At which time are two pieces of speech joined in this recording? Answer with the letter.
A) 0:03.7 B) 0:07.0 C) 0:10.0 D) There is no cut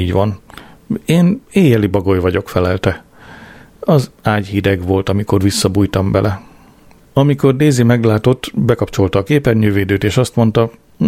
B